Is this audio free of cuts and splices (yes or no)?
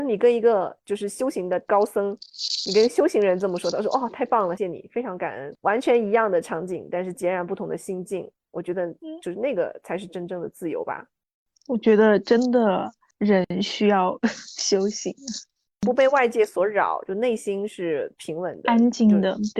no